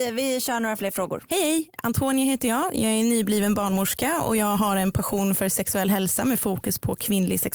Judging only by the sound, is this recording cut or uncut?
cut